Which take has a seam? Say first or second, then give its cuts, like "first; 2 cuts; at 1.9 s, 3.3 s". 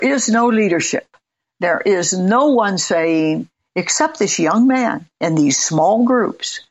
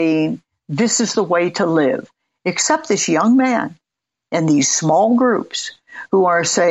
first; 2 cuts; at 3.6 s, 5.1 s